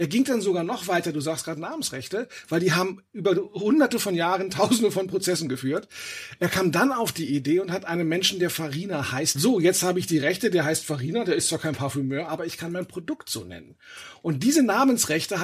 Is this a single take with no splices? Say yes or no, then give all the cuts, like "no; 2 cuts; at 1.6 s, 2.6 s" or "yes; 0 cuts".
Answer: no; 1 cut; at 9.3 s